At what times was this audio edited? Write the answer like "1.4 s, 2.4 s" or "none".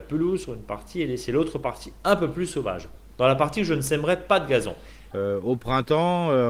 5.1 s